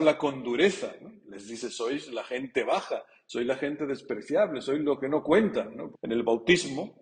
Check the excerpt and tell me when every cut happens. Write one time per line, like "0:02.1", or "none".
0:05.9